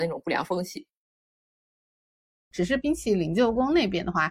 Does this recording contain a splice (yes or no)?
yes